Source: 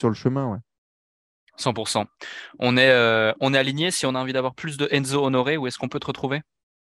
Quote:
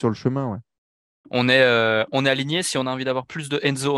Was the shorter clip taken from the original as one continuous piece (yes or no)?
no